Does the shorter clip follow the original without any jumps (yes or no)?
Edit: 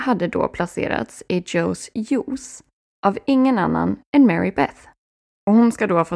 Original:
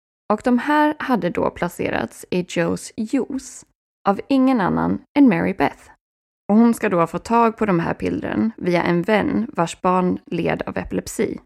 yes